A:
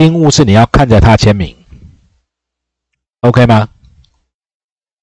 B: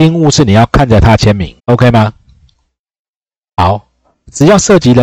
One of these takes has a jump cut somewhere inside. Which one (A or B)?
B